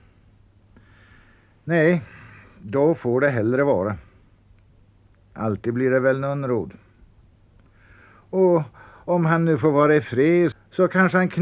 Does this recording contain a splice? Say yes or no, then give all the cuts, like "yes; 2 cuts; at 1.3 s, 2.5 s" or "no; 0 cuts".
yes; 1 cut; at 10.5 s